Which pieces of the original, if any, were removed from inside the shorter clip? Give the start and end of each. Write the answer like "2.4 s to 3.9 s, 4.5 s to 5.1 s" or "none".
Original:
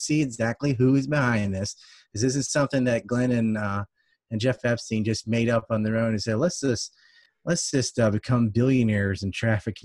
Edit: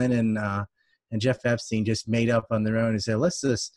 none